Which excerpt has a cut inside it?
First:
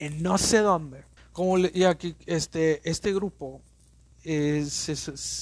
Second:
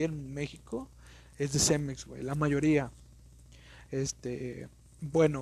first; 2 cuts; at 1.2 s, 4.1 s

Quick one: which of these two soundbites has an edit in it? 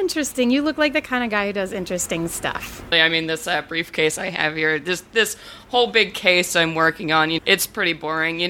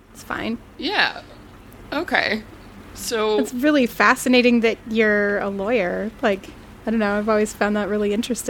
first; 2 cuts; at 2.9 s, 7.4 s

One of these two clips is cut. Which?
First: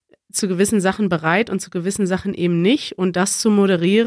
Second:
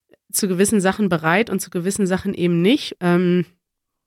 second; 1 cut; at 2.9 s

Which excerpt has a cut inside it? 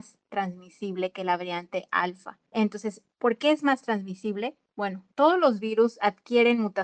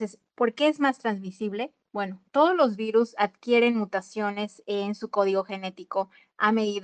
first; 1 cut; at 2.5 s

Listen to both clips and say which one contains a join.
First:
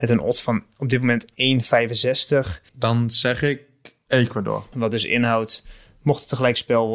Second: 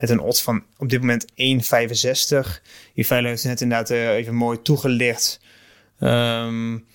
first; 2 cuts; at 2.7 s, 4.7 s

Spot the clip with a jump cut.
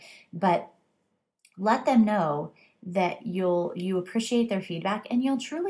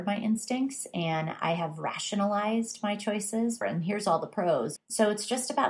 second; 2 cuts; at 3.6 s, 4.8 s

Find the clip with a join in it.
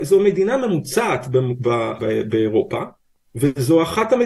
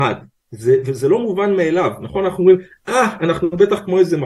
first; 1 cut; at 2.0 s

